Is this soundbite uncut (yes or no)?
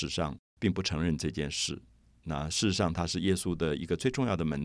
yes